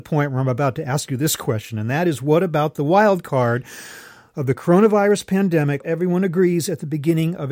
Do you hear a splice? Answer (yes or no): yes